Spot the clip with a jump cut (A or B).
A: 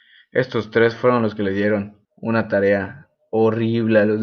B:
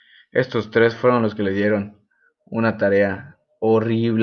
A